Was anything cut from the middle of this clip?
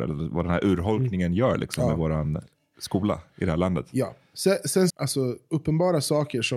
yes; 1 cut; at 4.9 s

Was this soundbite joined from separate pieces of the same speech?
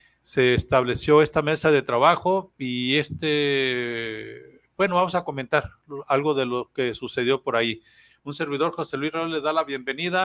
no; 0 cuts

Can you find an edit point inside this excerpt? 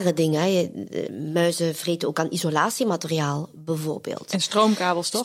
no; 0 cuts

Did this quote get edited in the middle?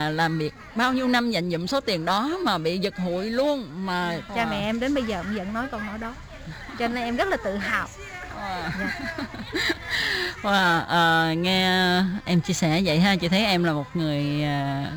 yes; 1 cut; at 4.3 s

